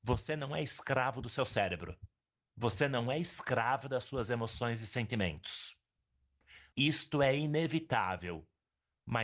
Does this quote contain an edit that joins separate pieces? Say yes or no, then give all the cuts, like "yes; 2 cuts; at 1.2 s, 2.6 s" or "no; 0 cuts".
yes; 1 cut; at 6.7 s